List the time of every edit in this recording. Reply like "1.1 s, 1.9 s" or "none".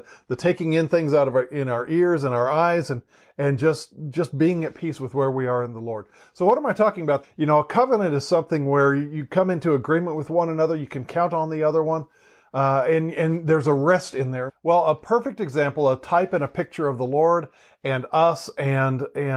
7.2 s, 14.5 s